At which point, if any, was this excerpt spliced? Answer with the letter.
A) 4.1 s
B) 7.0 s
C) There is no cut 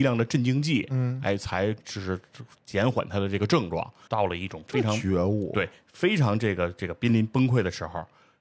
A